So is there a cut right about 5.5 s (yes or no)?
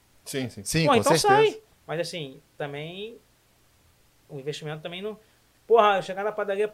no